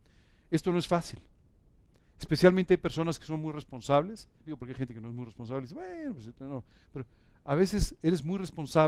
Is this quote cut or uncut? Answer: cut